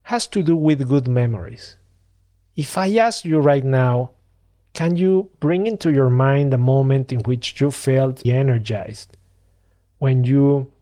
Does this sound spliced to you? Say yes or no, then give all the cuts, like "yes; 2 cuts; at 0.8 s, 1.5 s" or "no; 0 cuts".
yes; 1 cut; at 8.2 s